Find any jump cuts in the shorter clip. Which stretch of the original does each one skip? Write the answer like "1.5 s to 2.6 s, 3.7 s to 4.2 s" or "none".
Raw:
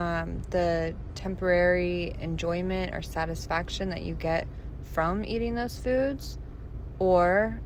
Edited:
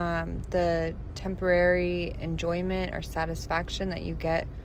none